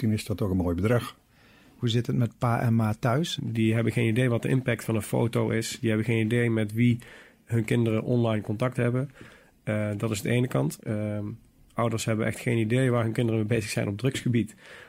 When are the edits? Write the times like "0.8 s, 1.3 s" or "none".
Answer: 3.4 s, 10.8 s